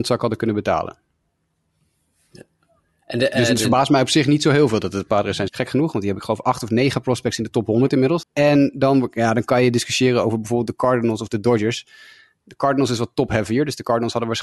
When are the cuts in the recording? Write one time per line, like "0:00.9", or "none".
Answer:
0:05.5
0:08.2